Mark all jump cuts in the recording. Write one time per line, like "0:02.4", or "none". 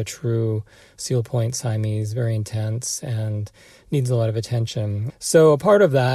0:05.1